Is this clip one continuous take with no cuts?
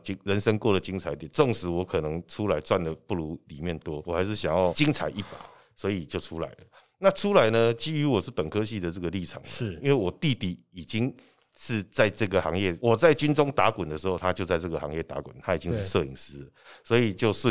yes; 0 cuts

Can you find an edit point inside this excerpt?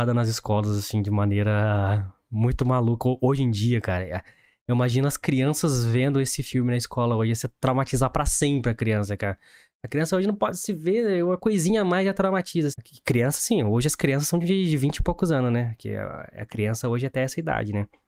yes; 1 cut; at 12.7 s

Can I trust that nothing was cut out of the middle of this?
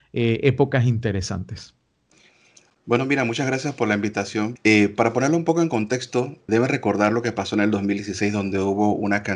no; 2 cuts; at 4.6 s, 6.5 s

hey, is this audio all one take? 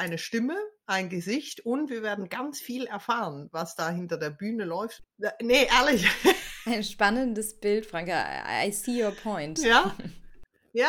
no; 1 cut; at 5.0 s

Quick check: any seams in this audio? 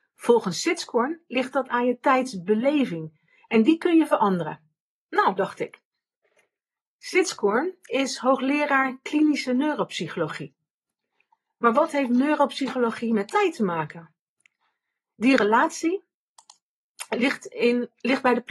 yes; 1 cut; at 5.4 s

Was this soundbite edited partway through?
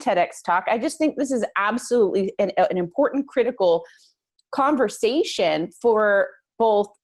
no; 0 cuts

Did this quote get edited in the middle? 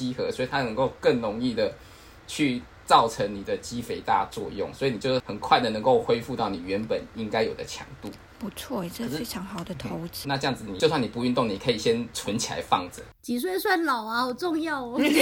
yes; 1 cut; at 10.2 s

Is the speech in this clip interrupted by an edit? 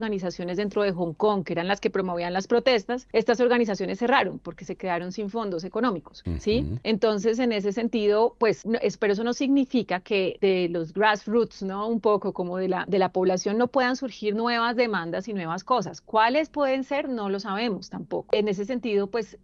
no; 0 cuts

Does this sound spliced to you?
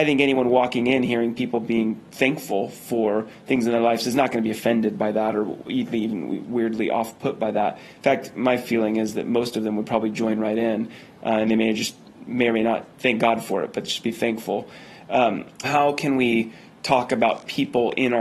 yes; 2 cuts; at 12.9 s, 15.6 s

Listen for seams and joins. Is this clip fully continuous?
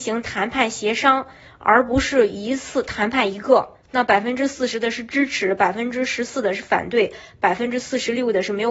yes; 0 cuts

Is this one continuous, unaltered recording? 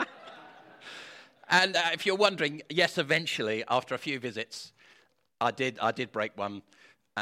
yes; 0 cuts

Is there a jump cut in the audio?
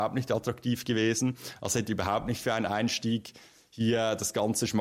no; 0 cuts

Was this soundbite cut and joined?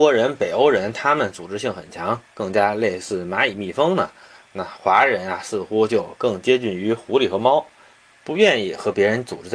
yes; 1 cut; at 8.1 s

